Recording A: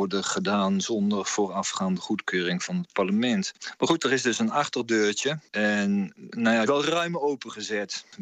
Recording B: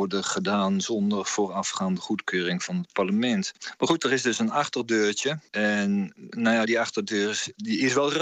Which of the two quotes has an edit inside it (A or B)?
A